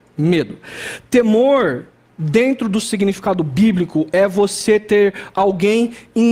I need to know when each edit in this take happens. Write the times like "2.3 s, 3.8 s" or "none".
1.0 s